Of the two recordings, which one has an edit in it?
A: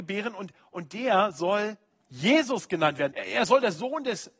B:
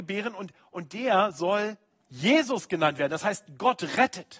A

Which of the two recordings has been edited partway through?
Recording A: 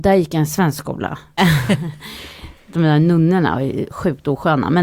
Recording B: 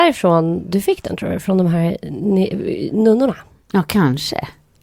A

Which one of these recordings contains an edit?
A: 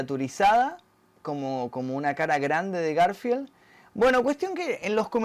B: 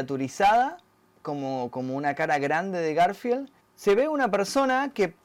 B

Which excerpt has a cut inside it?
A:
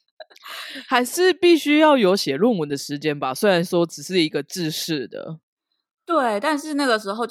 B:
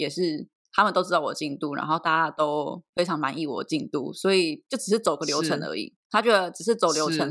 B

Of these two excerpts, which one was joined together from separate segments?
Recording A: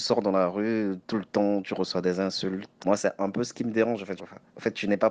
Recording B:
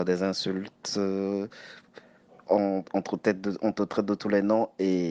A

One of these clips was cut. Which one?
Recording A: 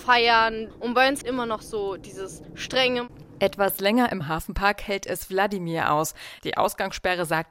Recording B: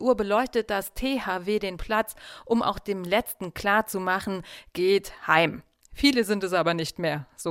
A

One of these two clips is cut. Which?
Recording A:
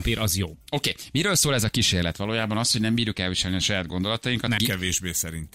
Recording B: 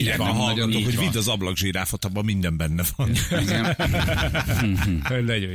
A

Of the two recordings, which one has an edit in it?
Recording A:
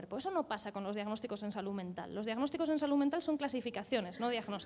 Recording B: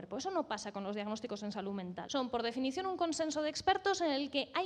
B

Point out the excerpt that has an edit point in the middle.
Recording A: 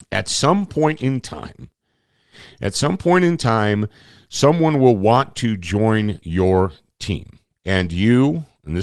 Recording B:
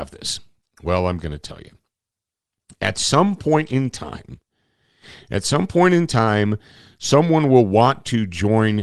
A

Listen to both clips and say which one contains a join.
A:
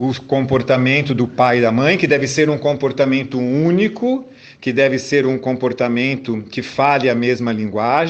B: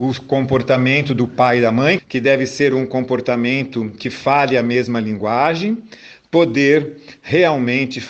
B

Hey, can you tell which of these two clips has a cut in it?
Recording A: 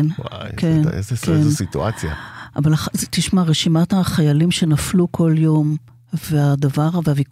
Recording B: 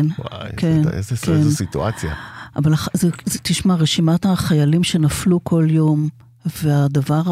A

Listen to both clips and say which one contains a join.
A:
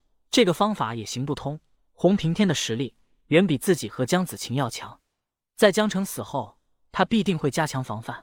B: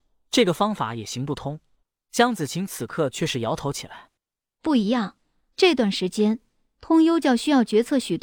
B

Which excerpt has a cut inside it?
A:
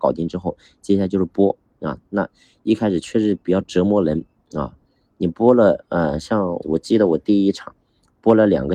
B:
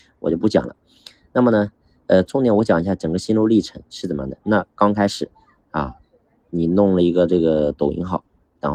A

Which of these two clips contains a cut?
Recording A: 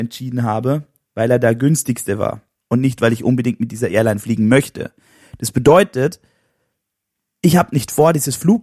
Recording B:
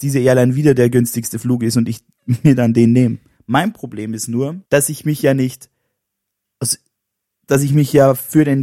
B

